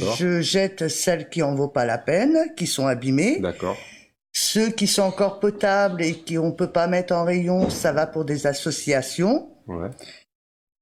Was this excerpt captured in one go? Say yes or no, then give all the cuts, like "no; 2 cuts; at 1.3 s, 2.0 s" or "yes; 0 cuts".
yes; 0 cuts